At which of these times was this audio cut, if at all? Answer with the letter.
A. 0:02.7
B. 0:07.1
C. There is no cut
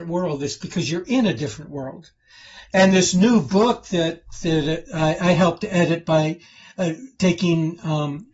C